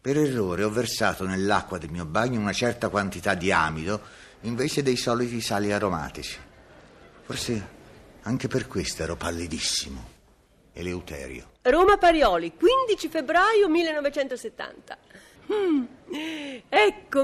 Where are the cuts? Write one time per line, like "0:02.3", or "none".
0:11.6
0:15.3